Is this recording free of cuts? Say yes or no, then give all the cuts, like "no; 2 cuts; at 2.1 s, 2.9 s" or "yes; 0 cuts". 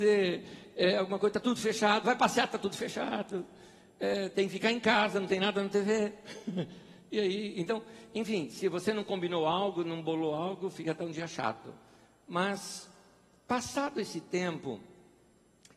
yes; 0 cuts